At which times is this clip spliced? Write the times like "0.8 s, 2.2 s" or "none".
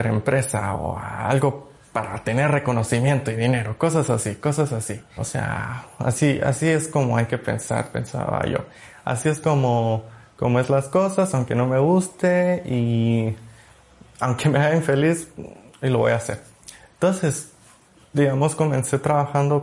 5.2 s

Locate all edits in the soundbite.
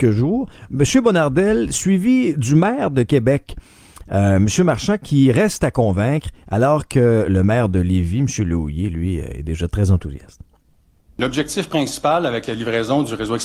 none

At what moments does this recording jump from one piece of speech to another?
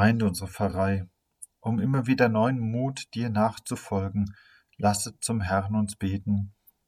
1.5 s

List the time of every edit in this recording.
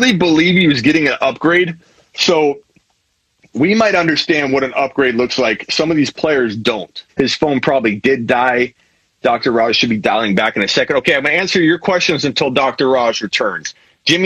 7.1 s

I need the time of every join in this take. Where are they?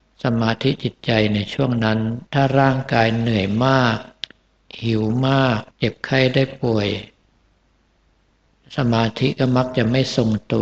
2.3 s, 5.7 s

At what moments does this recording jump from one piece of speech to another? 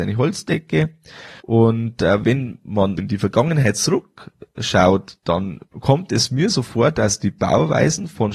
1.4 s, 3.0 s, 5.7 s

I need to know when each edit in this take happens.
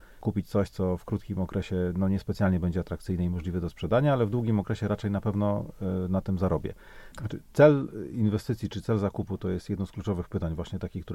7.1 s

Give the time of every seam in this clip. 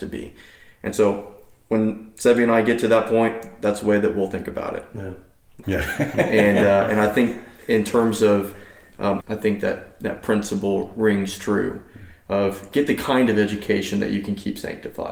5.6 s, 9.2 s

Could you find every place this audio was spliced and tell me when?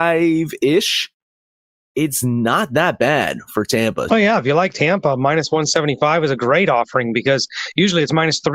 4.1 s

